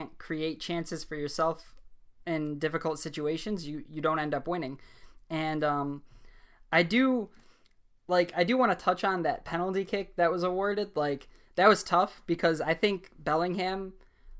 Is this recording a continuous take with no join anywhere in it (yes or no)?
yes